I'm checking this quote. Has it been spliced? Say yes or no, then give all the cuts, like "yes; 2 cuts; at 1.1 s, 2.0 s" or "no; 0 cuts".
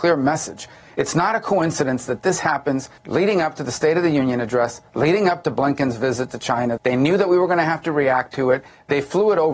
yes; 2 cuts; at 3.0 s, 6.8 s